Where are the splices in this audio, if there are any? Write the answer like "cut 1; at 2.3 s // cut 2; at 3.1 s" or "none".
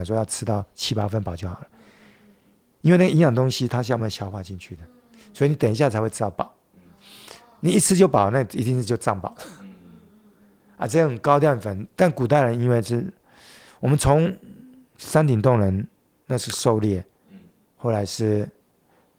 cut 1; at 4.0 s